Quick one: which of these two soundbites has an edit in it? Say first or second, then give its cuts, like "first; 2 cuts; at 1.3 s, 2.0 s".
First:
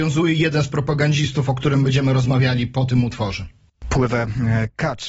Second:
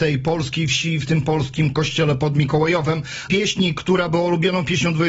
second; 1 cut; at 3.3 s